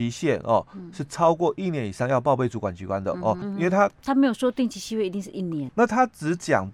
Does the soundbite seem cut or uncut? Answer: cut